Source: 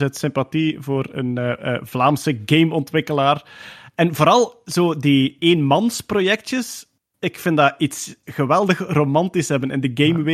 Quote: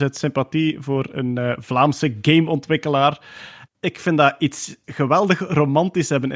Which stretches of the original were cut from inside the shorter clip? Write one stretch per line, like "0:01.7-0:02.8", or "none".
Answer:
0:01.6-0:01.8
0:03.9-0:07.1